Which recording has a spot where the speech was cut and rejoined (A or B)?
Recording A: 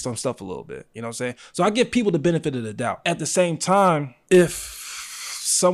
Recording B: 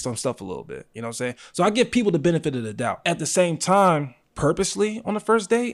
B